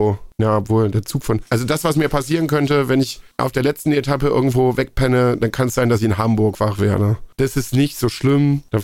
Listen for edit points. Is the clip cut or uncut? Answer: uncut